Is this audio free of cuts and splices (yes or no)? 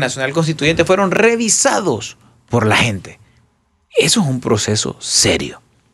yes